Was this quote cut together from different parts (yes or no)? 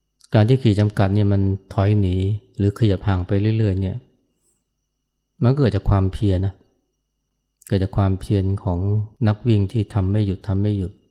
yes